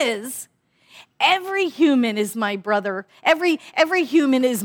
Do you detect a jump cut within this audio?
no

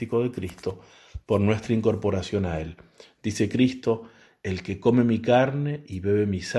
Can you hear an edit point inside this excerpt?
no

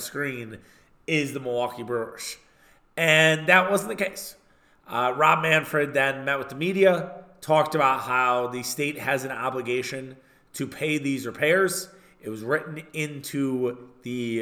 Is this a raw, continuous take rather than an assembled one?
yes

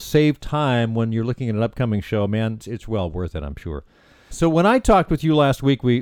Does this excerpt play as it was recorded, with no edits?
no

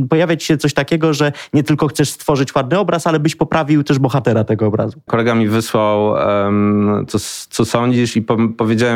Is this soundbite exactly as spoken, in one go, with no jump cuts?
no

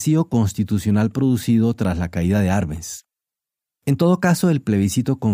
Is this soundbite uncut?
yes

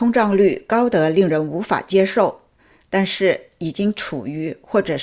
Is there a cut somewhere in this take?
no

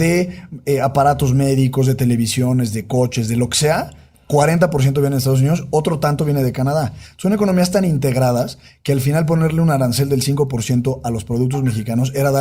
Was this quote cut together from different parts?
no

